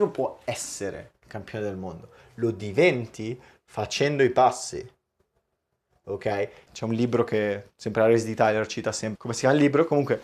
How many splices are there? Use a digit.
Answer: 2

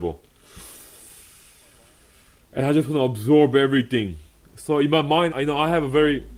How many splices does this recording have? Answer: 1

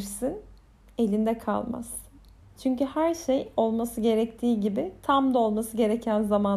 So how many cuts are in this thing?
1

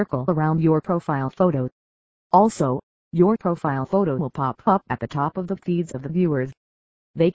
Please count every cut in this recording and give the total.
0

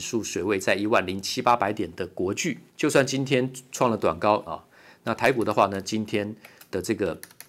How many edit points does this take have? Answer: 2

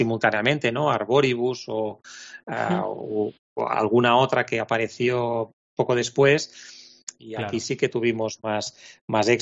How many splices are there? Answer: 2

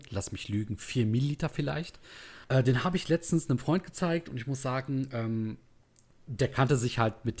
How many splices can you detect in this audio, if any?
1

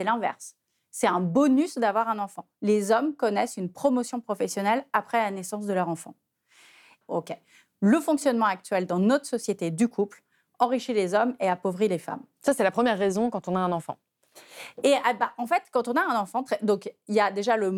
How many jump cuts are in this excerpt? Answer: 1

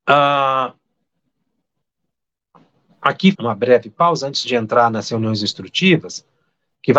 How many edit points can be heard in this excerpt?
1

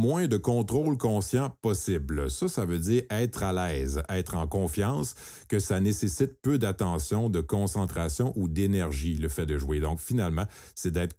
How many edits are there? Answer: 0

